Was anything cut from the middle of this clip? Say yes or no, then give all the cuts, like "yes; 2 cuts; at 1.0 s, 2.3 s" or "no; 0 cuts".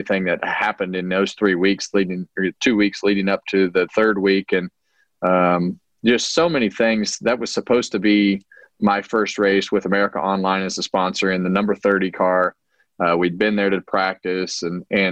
no; 0 cuts